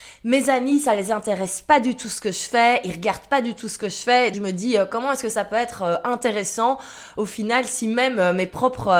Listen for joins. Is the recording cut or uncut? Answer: cut